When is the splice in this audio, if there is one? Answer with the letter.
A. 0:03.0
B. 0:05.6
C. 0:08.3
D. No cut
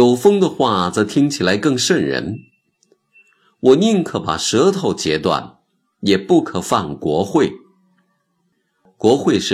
D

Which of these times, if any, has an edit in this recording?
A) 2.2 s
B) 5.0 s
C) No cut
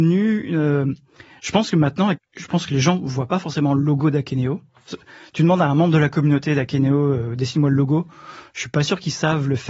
A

